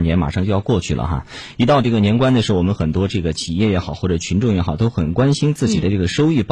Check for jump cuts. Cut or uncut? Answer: uncut